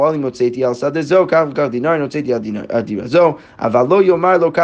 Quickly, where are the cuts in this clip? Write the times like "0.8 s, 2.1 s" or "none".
none